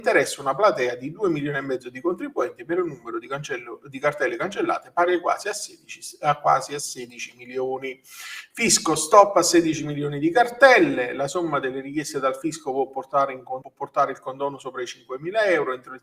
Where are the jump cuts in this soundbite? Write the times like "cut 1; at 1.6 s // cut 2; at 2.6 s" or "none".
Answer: cut 1; at 8.5 s // cut 2; at 13.6 s